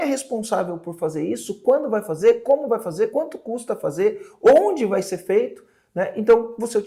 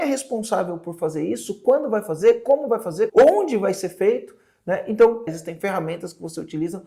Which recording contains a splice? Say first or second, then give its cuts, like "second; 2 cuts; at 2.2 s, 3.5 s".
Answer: second; 2 cuts; at 3.1 s, 5.3 s